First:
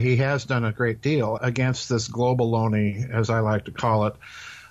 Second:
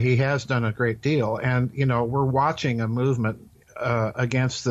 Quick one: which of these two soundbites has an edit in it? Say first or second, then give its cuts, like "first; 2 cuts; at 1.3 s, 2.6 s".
first; 1 cut; at 1.4 s